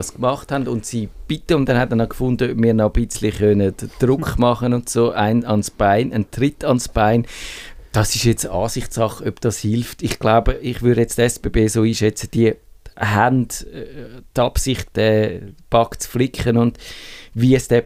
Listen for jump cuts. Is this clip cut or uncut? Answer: uncut